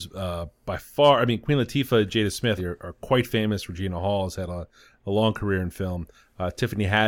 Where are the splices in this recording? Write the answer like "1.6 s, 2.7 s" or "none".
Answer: 2.6 s